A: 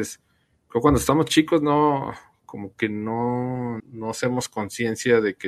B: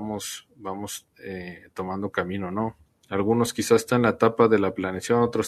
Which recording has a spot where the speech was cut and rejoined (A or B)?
A